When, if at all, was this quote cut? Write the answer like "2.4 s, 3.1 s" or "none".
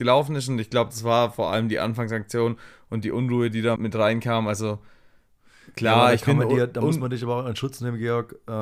3.8 s